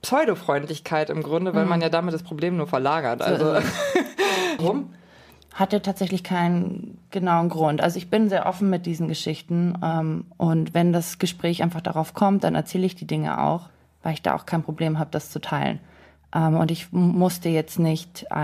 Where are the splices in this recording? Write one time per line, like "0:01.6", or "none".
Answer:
0:04.6